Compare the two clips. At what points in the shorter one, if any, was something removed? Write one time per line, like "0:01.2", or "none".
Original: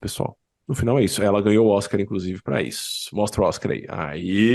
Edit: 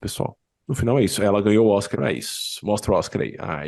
0:01.9